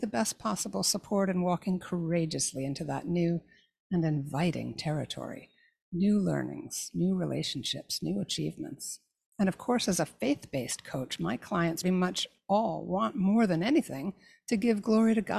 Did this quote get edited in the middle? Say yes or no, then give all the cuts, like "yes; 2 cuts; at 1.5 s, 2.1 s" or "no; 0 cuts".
yes; 1 cut; at 11.8 s